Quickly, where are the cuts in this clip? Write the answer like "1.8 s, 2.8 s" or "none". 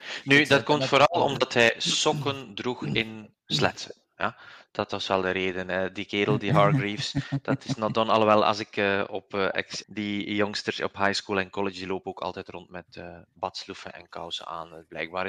9.8 s